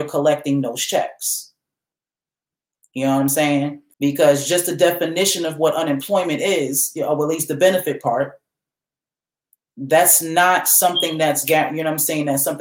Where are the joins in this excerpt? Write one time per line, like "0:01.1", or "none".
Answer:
0:03.9